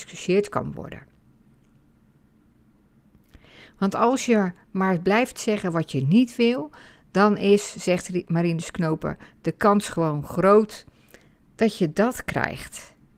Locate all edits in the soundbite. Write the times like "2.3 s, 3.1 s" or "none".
11.4 s